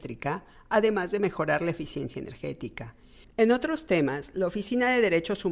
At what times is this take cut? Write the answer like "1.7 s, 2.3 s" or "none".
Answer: 3.2 s